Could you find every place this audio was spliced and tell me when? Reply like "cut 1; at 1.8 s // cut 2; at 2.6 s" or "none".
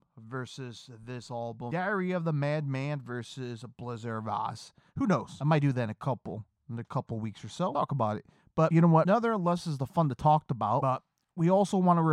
none